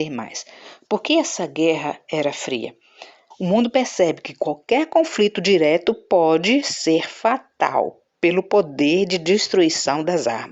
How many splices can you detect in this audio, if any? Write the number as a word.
one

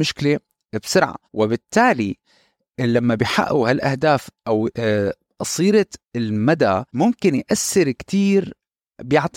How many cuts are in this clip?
two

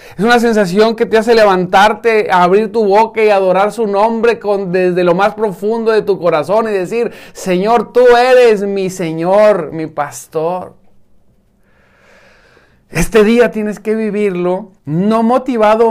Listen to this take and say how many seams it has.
one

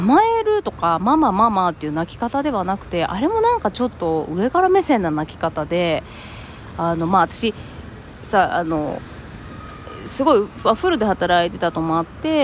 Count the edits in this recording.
zero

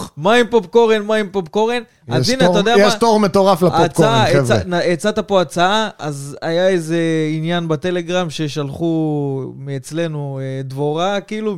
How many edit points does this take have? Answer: zero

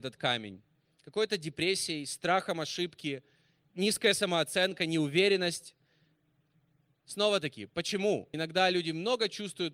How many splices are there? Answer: one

